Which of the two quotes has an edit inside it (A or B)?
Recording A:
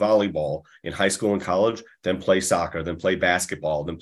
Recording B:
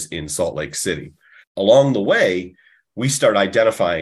B